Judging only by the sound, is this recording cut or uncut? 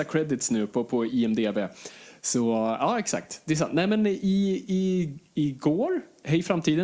uncut